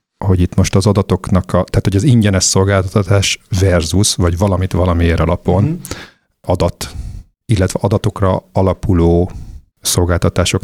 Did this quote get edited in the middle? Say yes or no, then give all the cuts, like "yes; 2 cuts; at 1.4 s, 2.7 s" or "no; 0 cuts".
no; 0 cuts